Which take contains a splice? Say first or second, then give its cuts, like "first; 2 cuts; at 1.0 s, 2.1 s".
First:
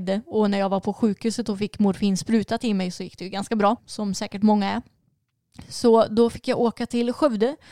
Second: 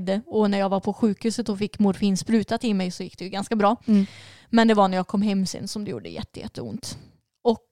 first; 1 cut; at 3.8 s